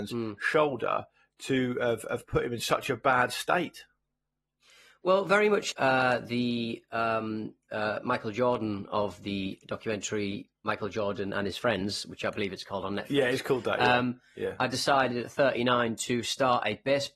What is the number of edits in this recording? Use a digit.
1